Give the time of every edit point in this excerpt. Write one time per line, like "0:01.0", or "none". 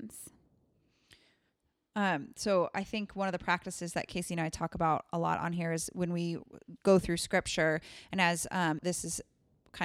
0:08.8